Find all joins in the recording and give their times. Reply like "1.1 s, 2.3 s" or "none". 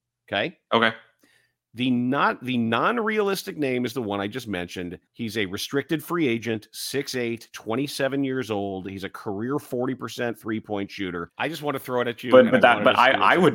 5.1 s, 11.3 s